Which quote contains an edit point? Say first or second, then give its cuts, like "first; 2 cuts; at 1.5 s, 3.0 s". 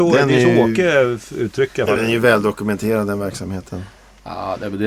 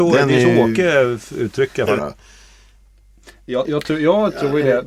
second; 1 cut; at 2.0 s